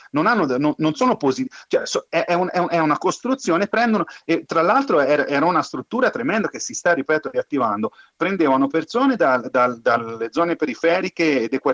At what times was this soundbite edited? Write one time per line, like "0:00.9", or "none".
none